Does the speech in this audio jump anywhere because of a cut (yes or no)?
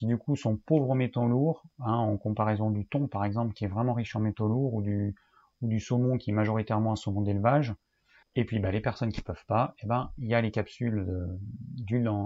yes